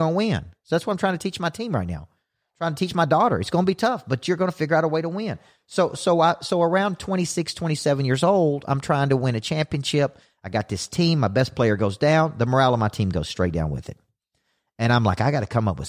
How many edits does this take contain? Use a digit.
0